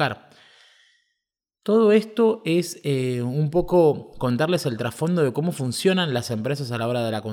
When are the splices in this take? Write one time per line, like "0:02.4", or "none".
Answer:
none